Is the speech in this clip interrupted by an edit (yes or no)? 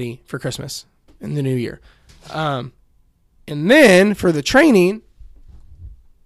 no